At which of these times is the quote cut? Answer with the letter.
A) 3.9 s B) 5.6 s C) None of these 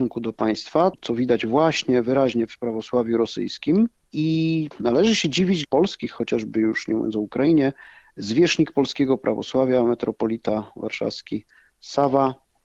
B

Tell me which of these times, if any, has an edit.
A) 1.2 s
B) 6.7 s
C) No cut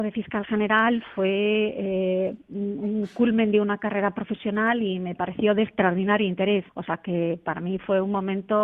B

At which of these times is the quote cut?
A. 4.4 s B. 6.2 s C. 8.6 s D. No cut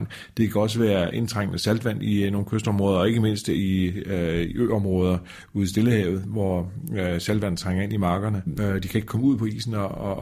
C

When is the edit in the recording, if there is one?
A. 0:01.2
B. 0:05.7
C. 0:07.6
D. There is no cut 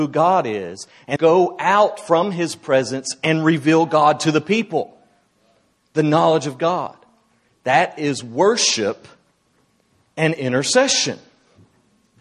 A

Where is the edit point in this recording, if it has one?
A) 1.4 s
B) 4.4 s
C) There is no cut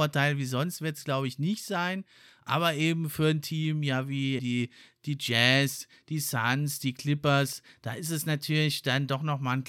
B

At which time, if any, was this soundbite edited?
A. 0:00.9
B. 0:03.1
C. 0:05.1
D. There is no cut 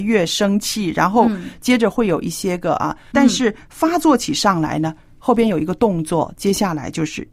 B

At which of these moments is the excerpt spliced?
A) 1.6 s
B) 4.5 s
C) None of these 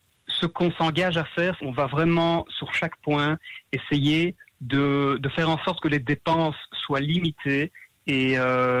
A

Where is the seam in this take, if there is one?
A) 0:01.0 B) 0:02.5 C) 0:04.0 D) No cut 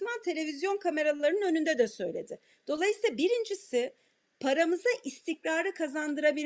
D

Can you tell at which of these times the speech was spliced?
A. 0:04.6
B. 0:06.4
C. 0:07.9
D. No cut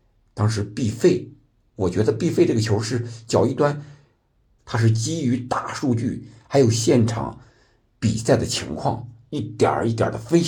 A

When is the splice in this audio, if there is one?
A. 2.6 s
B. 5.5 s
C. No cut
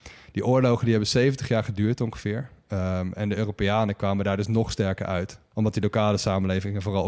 C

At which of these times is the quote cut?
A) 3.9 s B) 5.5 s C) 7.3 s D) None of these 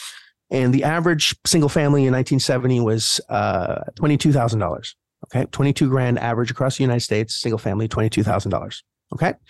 A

